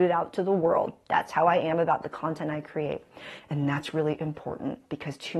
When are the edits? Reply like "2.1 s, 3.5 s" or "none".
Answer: 3.4 s